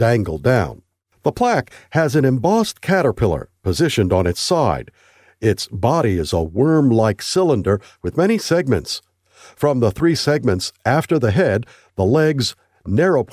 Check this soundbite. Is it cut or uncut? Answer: cut